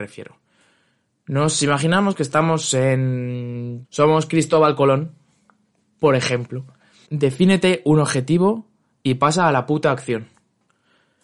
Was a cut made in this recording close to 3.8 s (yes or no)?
yes